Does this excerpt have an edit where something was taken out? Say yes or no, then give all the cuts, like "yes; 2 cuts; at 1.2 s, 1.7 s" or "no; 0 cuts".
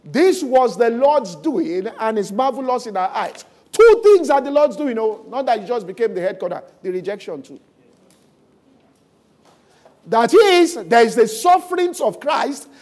no; 0 cuts